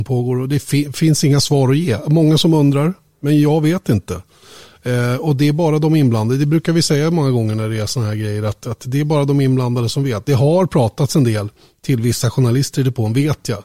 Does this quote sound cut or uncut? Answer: uncut